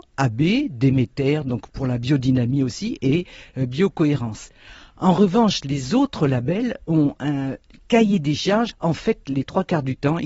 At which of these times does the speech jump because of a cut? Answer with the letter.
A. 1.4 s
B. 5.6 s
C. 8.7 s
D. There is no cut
C